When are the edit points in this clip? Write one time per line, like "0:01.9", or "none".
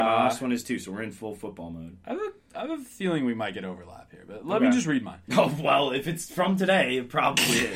none